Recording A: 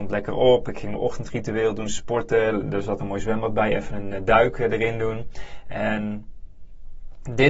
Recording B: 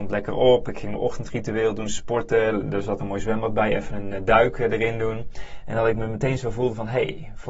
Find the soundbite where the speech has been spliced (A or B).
B